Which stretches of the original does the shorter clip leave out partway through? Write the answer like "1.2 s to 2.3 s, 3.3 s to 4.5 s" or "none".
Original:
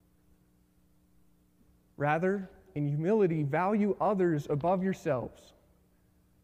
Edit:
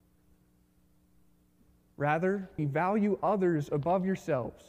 2.6 s to 3.4 s